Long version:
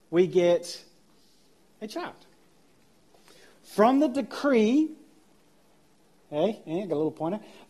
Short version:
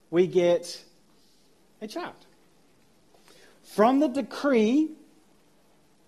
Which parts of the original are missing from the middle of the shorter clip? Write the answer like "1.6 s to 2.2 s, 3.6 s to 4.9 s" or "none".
none